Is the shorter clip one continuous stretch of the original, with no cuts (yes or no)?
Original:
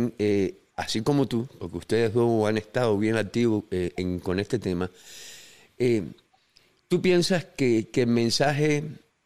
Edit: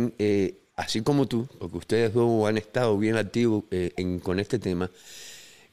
yes